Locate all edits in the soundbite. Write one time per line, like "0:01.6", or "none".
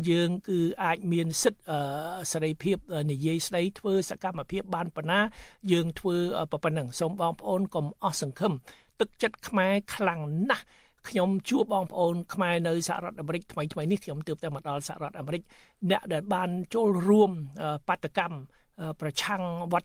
0:11.6